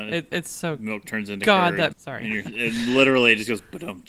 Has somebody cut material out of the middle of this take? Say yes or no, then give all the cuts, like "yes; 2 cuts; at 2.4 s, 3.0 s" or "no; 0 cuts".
yes; 1 cut; at 1.9 s